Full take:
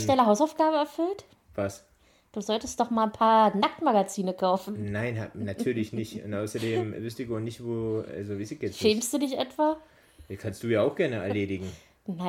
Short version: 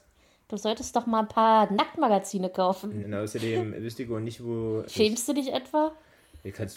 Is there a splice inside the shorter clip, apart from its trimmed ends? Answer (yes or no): yes